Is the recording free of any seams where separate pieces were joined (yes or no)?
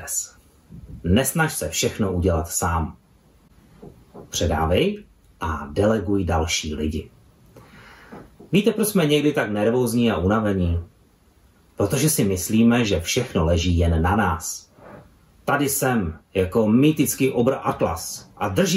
yes